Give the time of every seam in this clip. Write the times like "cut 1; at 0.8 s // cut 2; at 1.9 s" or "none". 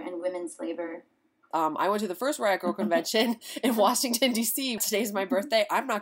cut 1; at 1.5 s // cut 2; at 4.8 s